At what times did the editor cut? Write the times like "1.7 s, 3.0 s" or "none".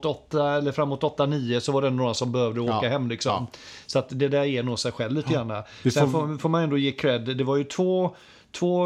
none